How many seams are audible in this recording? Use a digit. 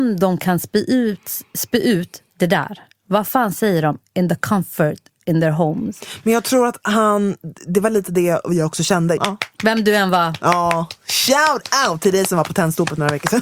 2